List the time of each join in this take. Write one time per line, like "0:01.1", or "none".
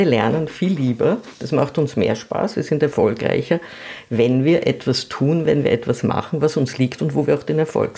none